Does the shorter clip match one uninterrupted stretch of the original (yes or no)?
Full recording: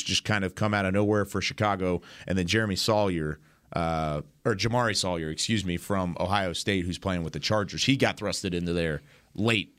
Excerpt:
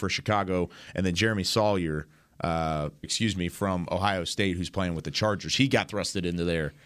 no